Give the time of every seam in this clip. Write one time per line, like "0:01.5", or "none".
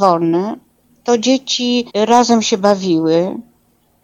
0:01.9